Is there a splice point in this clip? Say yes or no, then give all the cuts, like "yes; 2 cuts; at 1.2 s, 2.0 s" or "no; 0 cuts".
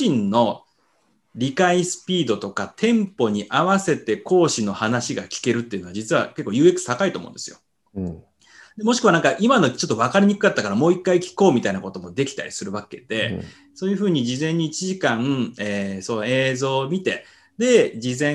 no; 0 cuts